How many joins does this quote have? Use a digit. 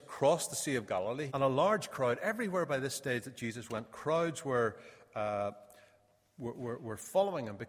1